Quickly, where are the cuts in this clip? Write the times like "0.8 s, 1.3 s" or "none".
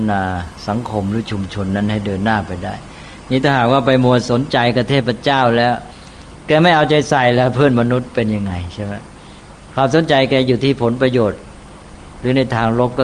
none